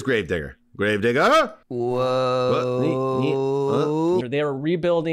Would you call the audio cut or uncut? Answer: cut